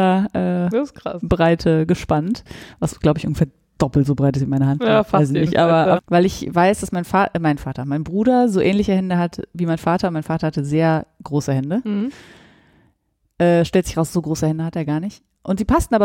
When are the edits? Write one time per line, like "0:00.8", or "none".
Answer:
0:06.0